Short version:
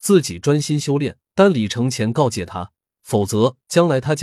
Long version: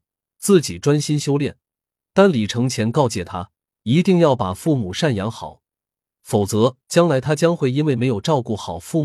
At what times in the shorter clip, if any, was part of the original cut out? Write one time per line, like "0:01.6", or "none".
0:01.2
0:02.8